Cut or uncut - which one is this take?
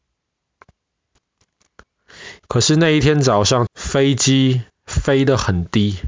cut